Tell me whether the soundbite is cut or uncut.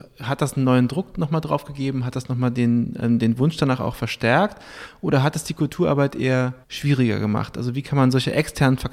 cut